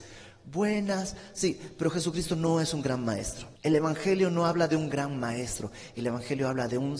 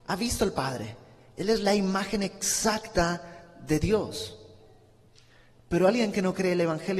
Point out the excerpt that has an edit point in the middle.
first; 1 cut; at 3.6 s

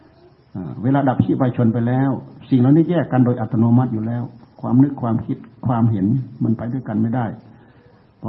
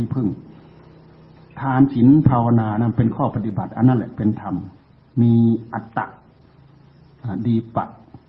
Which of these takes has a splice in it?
second; 1 cut; at 5.9 s

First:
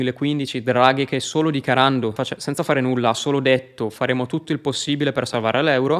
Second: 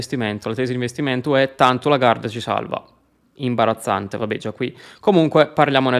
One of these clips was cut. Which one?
first; 1 cut; at 2.2 s

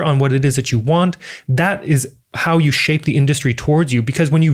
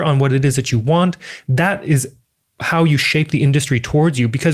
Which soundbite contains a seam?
first; 1 cut; at 2.2 s

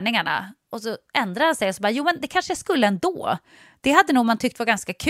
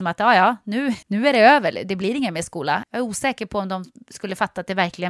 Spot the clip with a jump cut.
second; 2 cuts; at 1.0 s, 2.8 s

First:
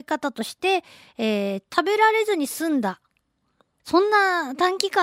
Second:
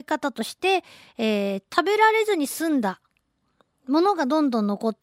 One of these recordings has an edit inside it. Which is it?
first; 1 cut; at 3.8 s

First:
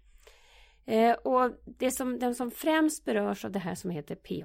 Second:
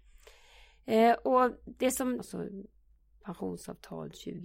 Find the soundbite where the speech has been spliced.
second; 1 cut; at 2.2 s

